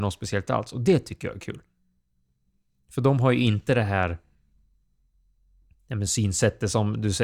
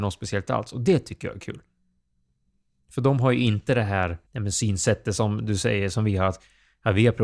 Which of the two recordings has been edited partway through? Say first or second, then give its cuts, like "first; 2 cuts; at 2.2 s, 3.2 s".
second; 1 cut; at 4.3 s